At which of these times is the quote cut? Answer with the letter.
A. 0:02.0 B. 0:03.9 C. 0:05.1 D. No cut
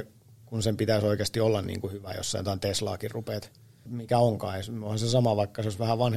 B